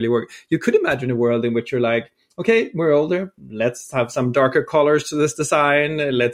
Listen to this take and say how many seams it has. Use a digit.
1